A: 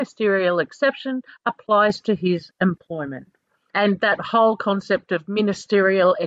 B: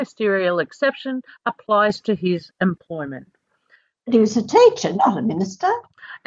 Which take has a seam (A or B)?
A